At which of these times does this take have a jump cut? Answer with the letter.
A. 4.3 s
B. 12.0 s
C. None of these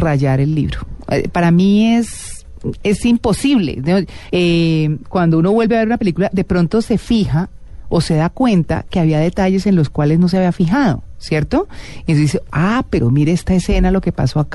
A